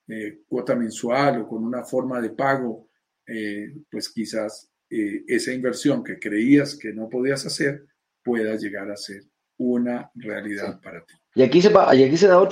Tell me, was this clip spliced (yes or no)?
yes